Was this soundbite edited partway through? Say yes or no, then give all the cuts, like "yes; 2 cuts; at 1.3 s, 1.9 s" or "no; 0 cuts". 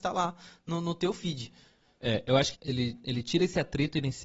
yes; 1 cut; at 2.5 s